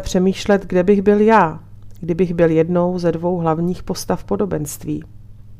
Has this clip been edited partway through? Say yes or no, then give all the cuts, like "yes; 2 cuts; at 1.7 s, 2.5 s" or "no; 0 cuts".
no; 0 cuts